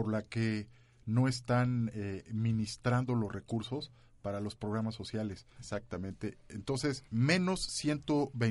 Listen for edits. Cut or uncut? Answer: cut